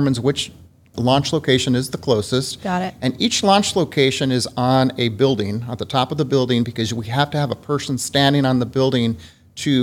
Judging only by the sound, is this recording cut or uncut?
uncut